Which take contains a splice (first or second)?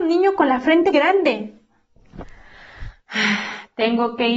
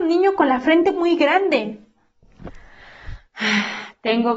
first